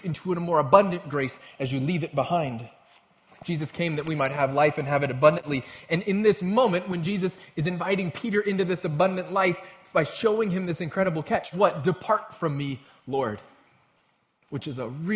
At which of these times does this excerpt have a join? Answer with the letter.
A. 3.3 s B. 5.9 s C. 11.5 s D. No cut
C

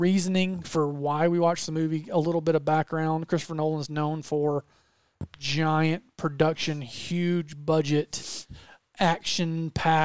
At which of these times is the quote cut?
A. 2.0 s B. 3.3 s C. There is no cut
C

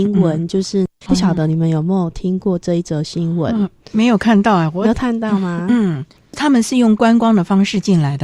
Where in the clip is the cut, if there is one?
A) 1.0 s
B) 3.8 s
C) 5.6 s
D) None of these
A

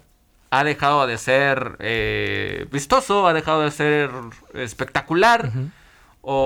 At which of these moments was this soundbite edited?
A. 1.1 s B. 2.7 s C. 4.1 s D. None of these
B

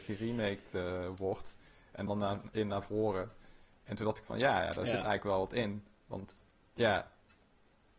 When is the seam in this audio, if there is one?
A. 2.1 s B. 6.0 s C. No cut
A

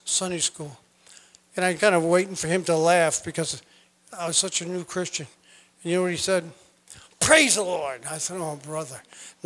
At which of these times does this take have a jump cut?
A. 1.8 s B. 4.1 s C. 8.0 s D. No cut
A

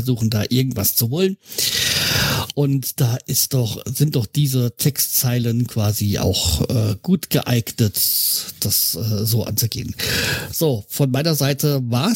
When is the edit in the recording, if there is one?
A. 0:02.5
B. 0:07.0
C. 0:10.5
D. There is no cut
D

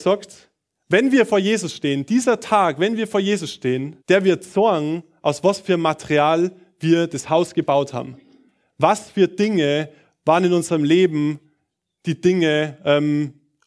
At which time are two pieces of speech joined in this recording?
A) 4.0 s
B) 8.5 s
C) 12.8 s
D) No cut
A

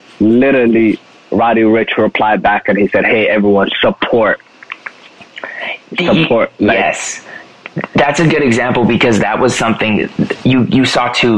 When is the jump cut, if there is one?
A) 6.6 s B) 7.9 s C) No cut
C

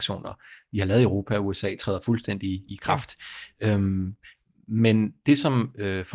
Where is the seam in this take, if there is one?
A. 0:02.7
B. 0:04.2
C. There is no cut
A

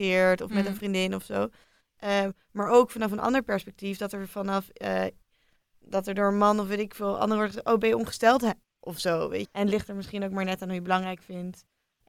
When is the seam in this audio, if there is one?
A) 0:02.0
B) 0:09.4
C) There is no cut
B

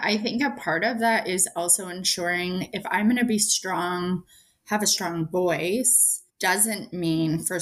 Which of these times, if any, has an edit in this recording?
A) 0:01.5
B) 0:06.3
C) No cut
B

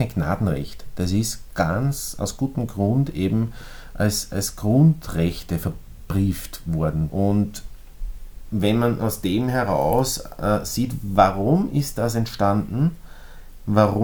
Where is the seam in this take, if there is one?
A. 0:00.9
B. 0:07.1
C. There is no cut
B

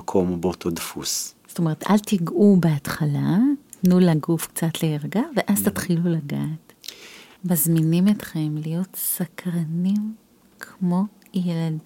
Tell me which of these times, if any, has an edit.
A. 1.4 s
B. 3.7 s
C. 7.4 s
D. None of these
C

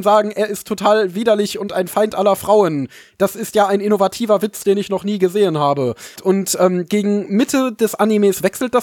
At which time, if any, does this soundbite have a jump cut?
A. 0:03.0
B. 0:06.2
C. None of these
B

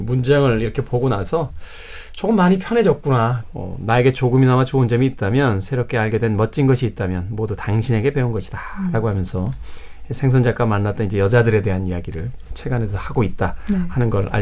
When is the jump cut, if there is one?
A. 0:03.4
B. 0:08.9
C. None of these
A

